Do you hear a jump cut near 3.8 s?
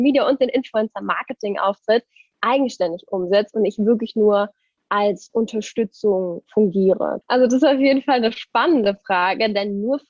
no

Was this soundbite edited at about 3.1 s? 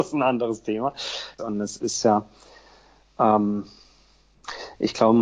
no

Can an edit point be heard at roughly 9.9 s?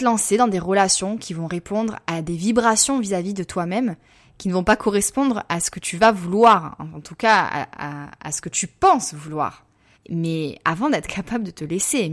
yes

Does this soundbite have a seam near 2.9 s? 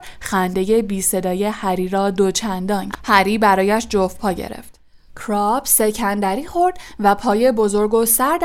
yes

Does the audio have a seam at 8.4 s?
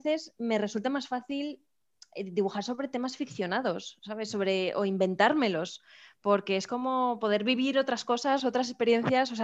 yes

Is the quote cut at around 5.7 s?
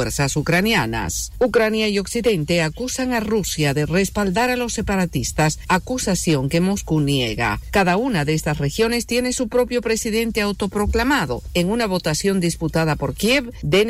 yes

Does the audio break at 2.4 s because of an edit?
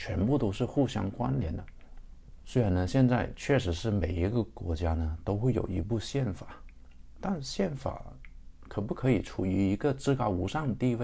yes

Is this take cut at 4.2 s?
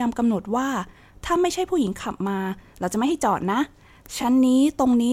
no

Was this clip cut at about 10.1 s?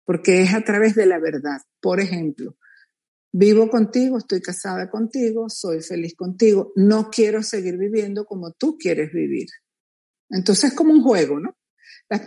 yes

